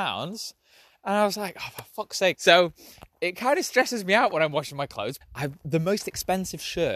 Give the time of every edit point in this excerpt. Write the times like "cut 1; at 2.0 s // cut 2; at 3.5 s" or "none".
cut 1; at 2.3 s // cut 2; at 5.2 s

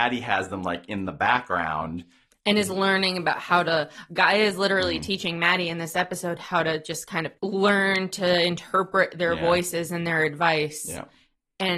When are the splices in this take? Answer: cut 1; at 7.4 s

